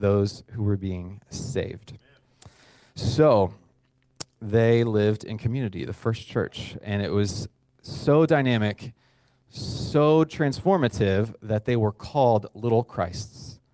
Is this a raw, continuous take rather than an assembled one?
yes; 0 cuts

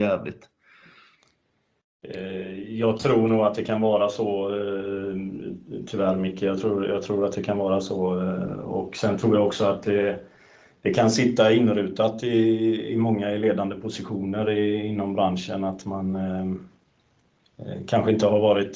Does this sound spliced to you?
no; 0 cuts

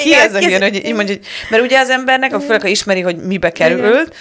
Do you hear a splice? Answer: no; 0 cuts

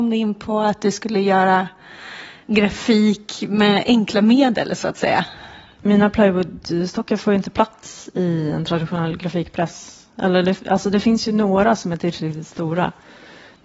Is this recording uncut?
yes; 0 cuts

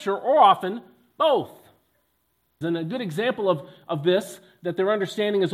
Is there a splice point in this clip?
yes; 1 cut; at 2.6 s

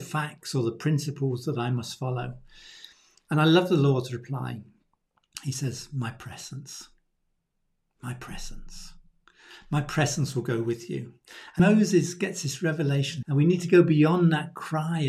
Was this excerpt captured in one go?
no; 2 cuts; at 11.6 s, 13.2 s

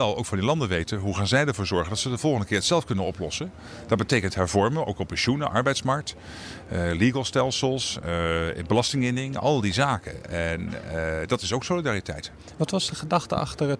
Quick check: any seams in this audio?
no; 0 cuts

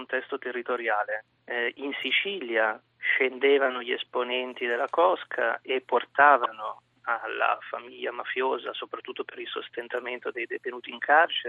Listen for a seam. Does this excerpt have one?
yes; 1 cut; at 2.9 s

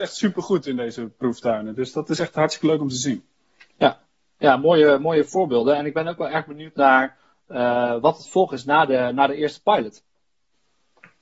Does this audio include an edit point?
no; 0 cuts

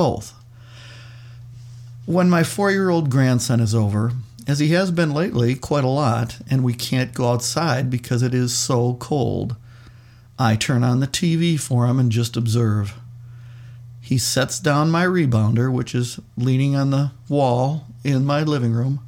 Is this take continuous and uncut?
yes; 0 cuts

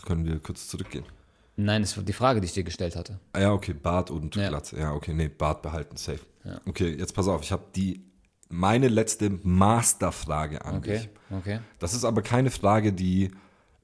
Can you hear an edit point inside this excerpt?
no; 0 cuts

